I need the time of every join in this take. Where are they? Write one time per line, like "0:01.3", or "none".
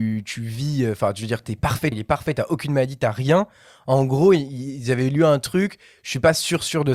0:01.9